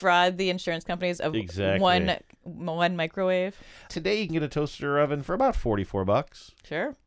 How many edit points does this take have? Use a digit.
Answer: 1